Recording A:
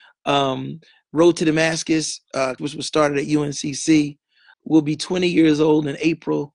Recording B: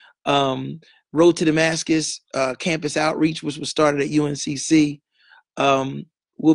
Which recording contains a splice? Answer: A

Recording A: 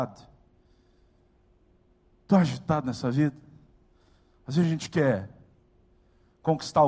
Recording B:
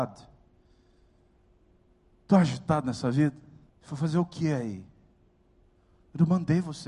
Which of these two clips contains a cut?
B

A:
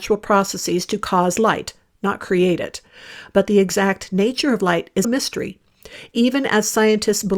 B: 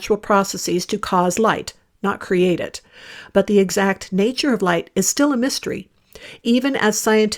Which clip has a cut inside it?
A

